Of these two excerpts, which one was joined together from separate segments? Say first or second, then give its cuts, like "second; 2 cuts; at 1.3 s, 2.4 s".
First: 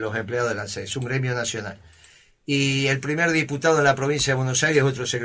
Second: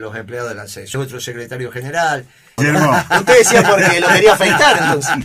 second; 2 cuts; at 0.9 s, 2.6 s